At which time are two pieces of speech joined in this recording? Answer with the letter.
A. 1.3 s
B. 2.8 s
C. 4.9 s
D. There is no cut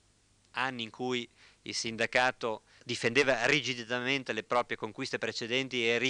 B